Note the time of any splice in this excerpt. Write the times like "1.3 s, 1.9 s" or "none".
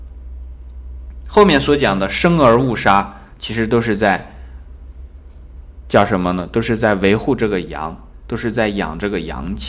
none